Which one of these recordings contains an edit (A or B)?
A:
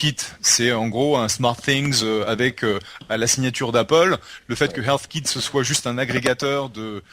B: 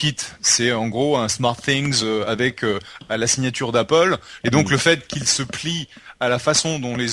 B